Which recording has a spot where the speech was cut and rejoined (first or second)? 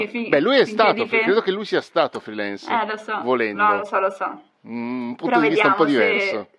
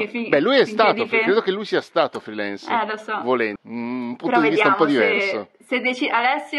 second